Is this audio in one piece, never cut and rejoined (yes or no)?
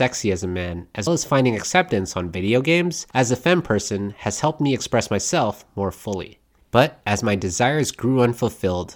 no